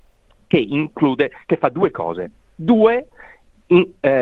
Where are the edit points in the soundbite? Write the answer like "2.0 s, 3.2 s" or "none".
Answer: 2.4 s